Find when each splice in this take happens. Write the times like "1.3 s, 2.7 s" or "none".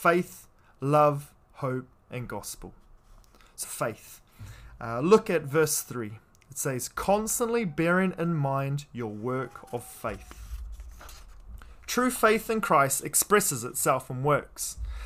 3.6 s